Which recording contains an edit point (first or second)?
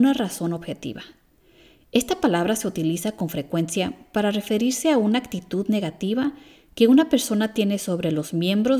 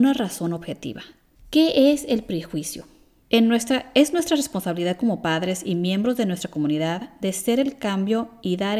second